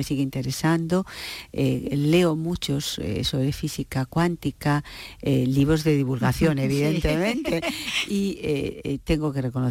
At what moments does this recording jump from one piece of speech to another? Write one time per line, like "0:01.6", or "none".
none